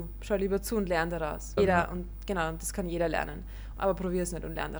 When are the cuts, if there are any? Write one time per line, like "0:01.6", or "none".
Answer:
0:01.6
0:03.7